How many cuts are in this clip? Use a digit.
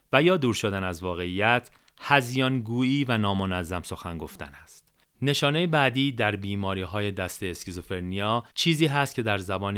2